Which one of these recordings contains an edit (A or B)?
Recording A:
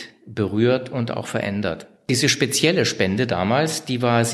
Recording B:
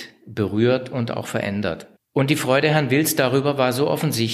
B